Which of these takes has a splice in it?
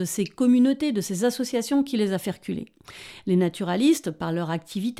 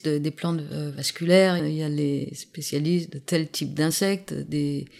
second; 1 cut; at 1.6 s

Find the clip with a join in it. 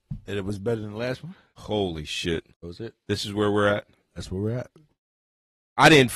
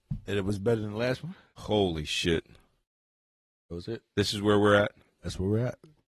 first; 1 cut; at 2.5 s

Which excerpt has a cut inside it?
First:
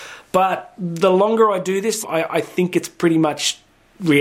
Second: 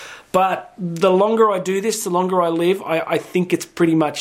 first; 1 cut; at 2.0 s

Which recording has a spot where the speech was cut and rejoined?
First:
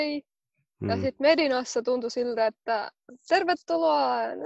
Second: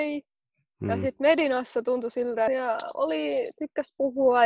second; 1 cut; at 2.5 s

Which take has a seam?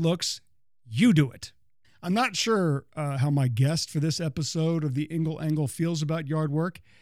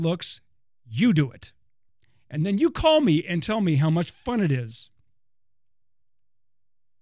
first; 1 cut; at 1.8 s

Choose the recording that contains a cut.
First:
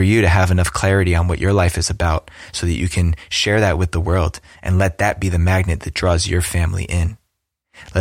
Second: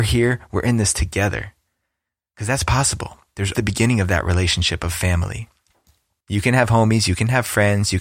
second; 2 cuts; at 3.6 s, 6.2 s

